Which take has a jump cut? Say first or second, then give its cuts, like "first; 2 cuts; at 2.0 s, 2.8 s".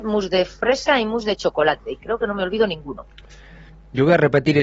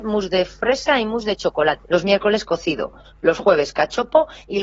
second; 1 cut; at 1.8 s